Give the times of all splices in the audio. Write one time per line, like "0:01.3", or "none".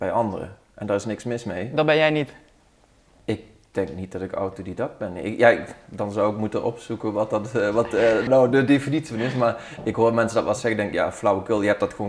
0:08.3